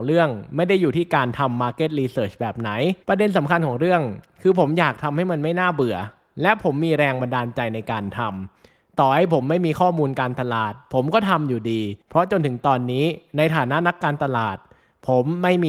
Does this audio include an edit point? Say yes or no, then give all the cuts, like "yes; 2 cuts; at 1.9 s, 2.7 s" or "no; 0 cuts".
yes; 2 cuts; at 3.0 s, 12.0 s